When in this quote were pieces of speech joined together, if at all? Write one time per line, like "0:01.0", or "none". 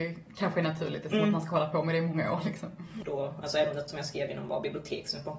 0:03.0